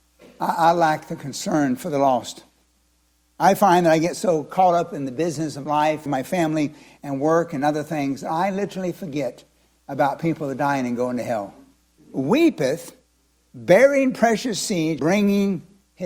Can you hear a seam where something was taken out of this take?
yes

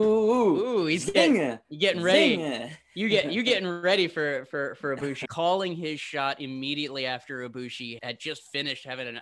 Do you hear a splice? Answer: yes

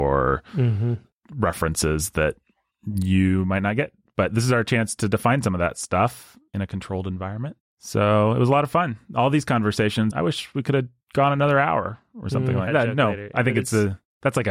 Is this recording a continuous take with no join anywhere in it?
no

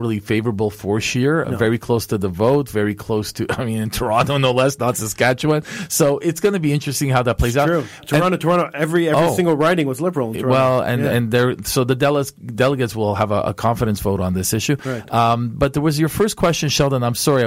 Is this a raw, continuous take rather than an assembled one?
yes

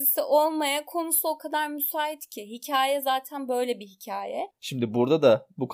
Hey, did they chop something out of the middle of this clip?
yes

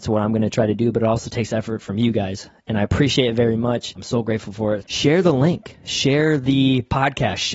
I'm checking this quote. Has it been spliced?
yes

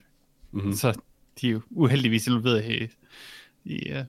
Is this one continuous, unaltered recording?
yes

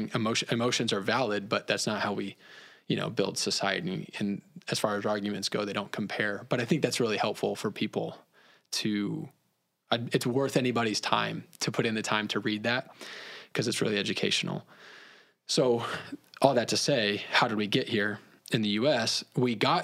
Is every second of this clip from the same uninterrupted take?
yes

